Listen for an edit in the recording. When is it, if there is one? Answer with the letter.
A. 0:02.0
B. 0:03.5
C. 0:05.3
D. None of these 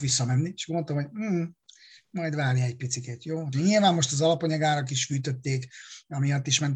B